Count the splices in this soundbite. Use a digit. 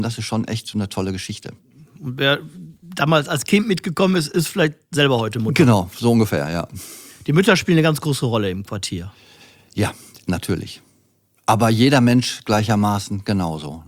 0